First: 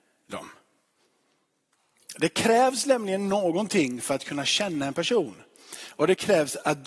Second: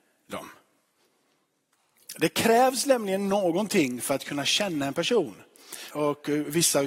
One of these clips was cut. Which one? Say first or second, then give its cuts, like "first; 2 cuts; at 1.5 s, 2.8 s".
second; 1 cut; at 5.9 s